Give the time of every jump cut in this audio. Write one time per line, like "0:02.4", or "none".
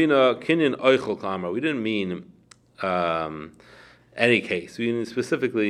none

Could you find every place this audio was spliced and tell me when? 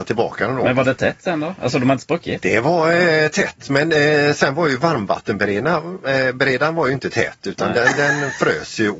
none

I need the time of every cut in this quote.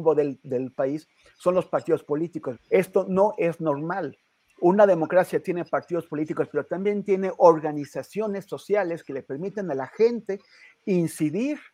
0:02.6

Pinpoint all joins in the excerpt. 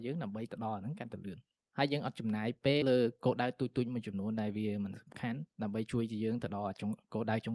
0:02.8
0:05.5

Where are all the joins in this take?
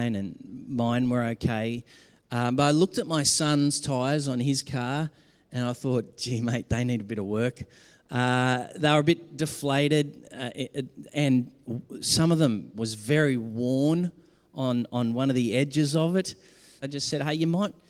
0:12.7
0:16.8

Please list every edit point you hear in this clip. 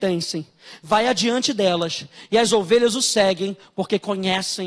none

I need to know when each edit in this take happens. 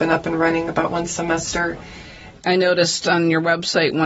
0:02.4

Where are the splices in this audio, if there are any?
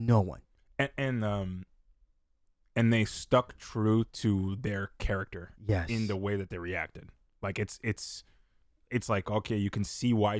none

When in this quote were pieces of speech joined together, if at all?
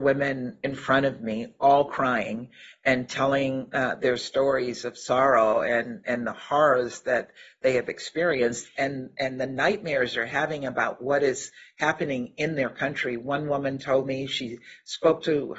none

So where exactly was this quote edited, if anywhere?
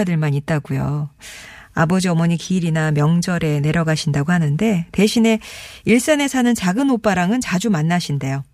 none

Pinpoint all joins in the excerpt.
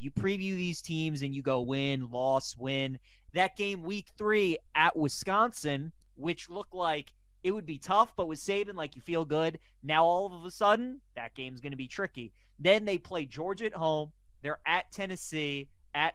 0:01.6
0:03.3

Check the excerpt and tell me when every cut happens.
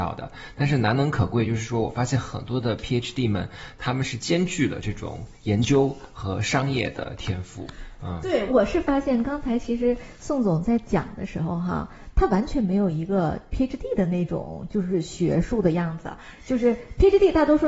none

